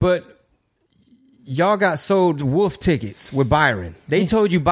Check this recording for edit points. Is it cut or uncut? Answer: uncut